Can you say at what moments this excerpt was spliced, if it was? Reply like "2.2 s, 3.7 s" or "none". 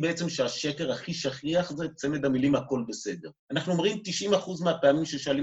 3.4 s